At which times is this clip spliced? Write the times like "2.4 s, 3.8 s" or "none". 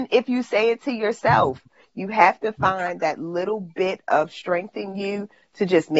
none

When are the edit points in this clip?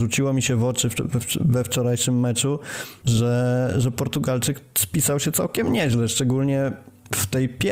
none

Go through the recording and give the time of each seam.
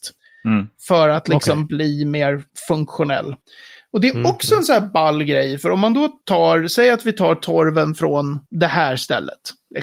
none

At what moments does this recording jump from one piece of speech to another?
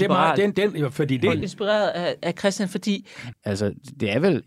1.4 s, 3.3 s

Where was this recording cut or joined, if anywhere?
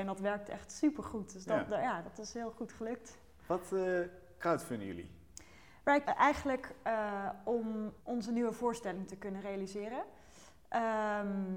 6.0 s, 8.0 s

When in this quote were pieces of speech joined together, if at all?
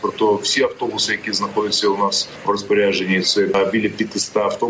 none

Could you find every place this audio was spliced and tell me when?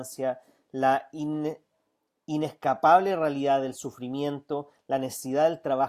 none

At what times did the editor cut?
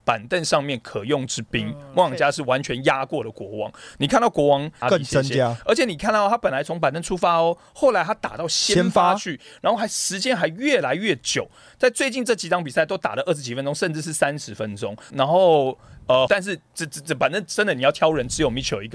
4.8 s, 15.1 s, 16.3 s

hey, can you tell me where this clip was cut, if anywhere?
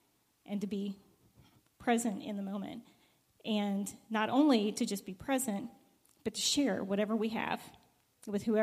none

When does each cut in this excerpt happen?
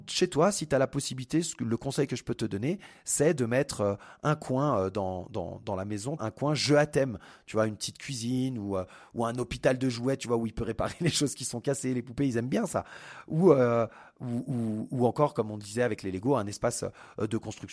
6.2 s

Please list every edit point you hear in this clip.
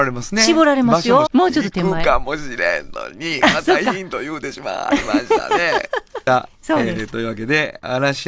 1.3 s, 6.3 s

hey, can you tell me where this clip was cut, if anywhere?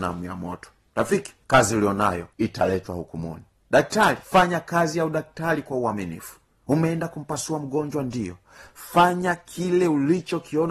4.2 s

